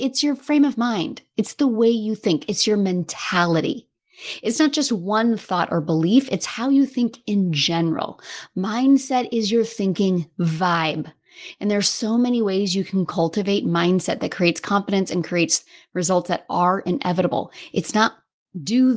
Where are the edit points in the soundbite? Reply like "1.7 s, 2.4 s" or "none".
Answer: none